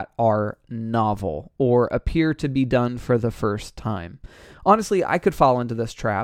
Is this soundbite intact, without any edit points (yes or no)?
yes